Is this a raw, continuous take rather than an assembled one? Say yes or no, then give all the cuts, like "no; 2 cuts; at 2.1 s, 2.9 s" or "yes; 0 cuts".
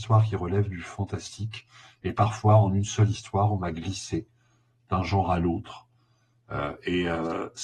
yes; 0 cuts